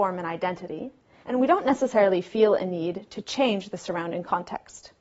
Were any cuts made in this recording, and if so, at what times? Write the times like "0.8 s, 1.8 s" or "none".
1.2 s